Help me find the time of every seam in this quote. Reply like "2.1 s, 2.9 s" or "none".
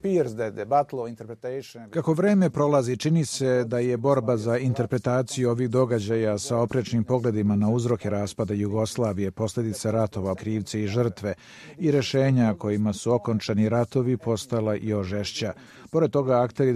10.4 s